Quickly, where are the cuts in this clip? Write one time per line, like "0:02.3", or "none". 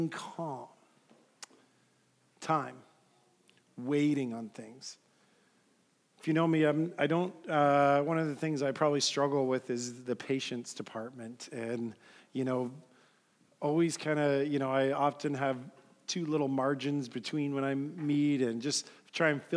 none